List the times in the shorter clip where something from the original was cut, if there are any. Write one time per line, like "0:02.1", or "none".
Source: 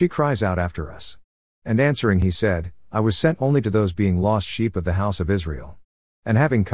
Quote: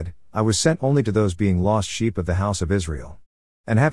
none